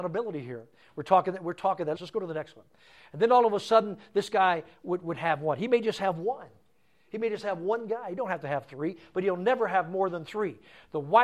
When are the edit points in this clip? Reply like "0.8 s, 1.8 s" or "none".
2.0 s